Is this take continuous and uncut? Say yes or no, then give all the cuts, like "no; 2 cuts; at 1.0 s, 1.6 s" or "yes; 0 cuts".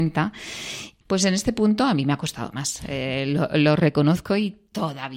no; 1 cut; at 1.0 s